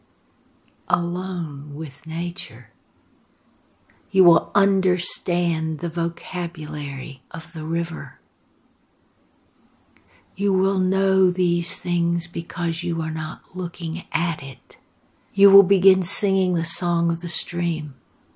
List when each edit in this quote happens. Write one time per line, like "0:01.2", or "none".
0:03.9
0:07.3
0:15.3